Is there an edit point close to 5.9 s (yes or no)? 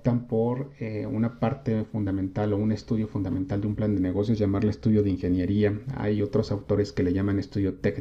no